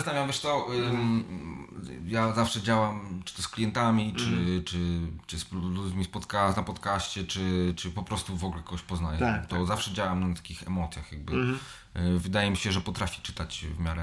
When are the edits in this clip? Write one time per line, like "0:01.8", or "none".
none